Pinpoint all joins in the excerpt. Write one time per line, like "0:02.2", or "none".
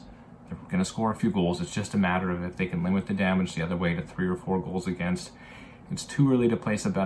0:05.9

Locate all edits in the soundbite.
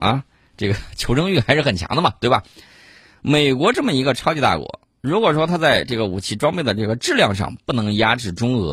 none

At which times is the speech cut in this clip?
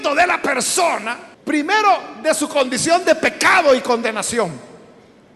0:01.3

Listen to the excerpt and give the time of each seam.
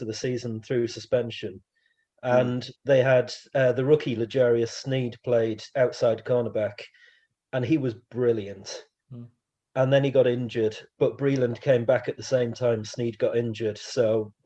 none

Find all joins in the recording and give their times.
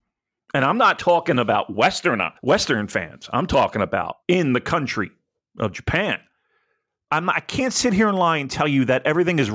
0:02.4
0:04.2
0:07.1

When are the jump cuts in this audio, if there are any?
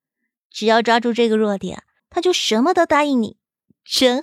0:02.0

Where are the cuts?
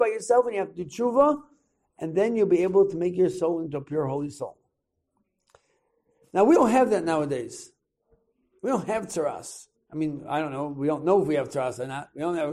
none

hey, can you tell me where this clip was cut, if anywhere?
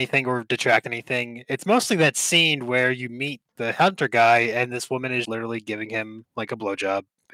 0:05.2

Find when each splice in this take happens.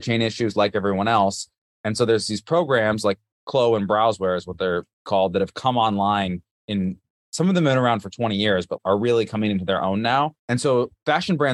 none

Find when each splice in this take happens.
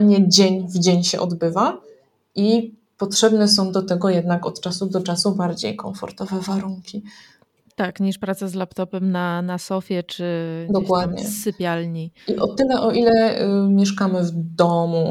none

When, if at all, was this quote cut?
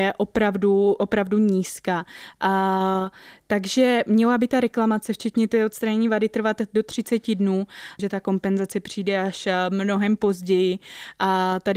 0:08.0

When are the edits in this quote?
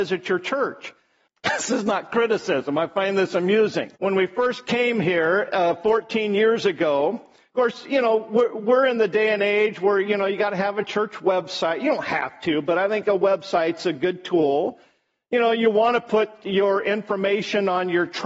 0:01.3
0:04.0

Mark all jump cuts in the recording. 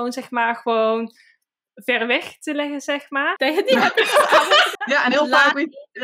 0:03.4
0:04.8

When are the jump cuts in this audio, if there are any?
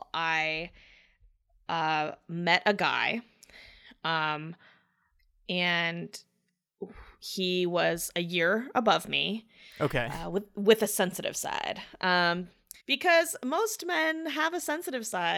0:09.7
0:12.8

